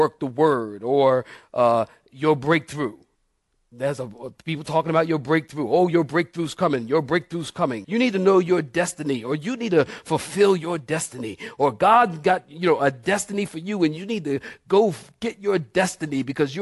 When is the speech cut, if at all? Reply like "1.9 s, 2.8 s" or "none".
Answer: 7.8 s